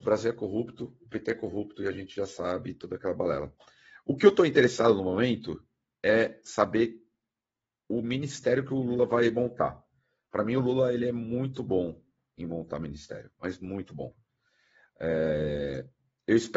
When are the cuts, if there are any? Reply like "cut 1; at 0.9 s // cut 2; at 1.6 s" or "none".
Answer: none